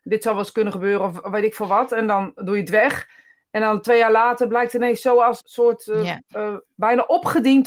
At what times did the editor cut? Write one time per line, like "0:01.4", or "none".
0:05.4
0:06.7